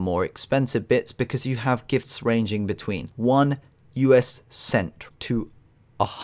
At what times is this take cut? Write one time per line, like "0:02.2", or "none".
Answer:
0:05.1